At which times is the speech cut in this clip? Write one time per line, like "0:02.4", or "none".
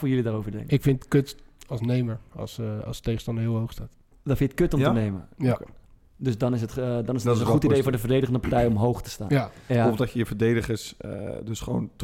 0:09.7